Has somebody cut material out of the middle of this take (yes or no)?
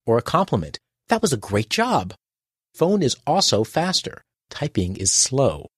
yes